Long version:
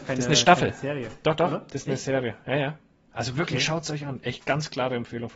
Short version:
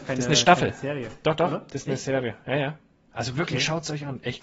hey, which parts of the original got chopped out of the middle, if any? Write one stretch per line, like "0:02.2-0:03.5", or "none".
none